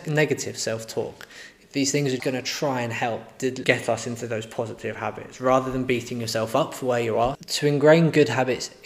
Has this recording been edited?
yes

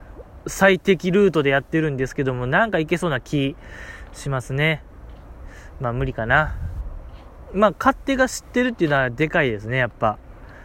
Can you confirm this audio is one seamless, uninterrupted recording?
no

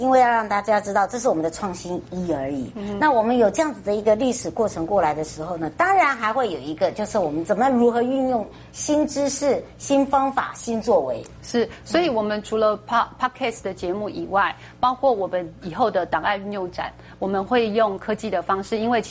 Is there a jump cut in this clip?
no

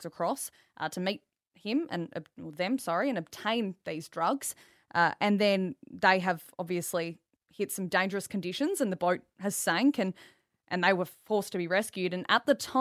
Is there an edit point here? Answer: no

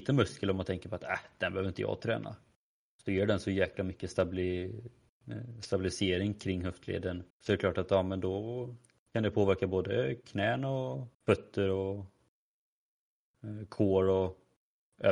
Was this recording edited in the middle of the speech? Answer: yes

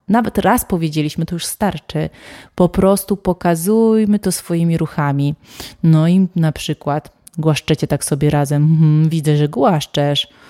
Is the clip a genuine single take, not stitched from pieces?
yes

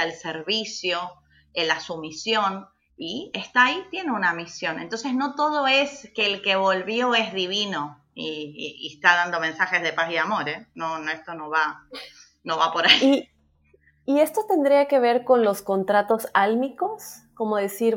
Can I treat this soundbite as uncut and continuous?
yes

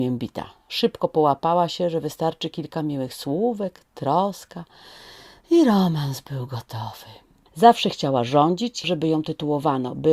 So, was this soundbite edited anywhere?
yes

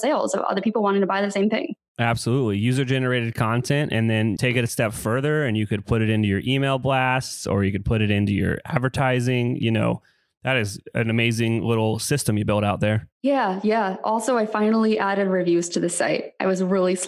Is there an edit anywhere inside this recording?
yes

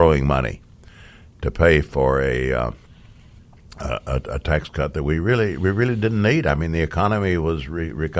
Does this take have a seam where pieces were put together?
no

